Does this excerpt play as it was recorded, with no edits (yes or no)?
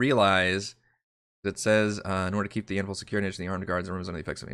yes